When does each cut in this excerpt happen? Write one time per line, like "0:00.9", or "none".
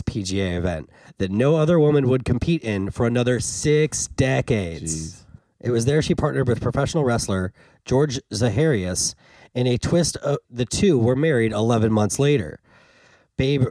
0:10.4